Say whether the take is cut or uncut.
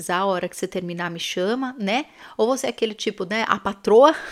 uncut